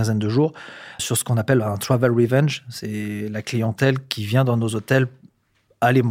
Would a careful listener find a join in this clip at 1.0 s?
yes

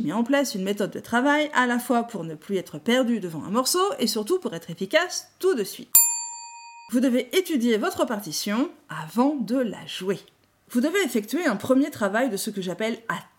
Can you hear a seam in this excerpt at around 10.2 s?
no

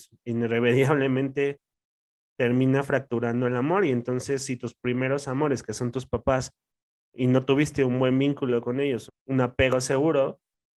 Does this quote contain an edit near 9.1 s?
yes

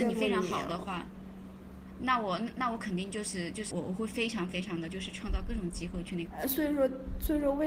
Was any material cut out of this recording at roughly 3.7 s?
yes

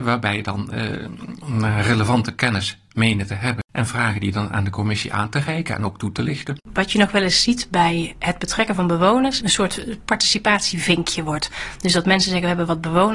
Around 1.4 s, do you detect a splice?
yes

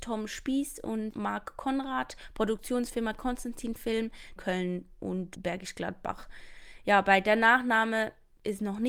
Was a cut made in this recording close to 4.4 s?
yes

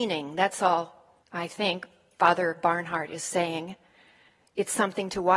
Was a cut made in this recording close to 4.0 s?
no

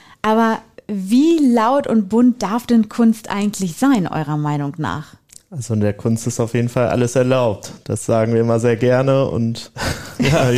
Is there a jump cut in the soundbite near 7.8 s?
no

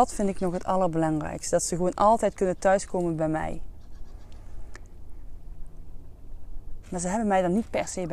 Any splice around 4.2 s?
no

